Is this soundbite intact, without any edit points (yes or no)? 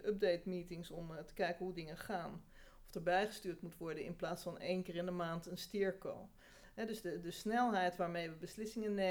yes